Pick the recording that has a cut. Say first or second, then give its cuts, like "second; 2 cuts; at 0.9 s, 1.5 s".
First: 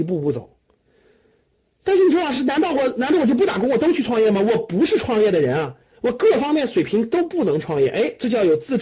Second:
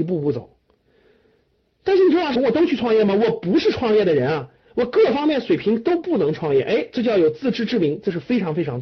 second; 1 cut; at 2.4 s